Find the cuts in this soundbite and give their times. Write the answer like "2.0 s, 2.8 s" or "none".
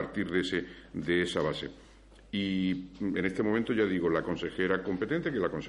none